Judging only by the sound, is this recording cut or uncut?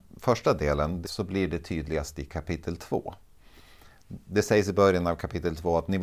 cut